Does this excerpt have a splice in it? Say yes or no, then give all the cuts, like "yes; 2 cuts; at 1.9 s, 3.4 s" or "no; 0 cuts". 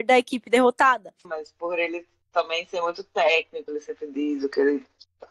yes; 2 cuts; at 1.2 s, 3.7 s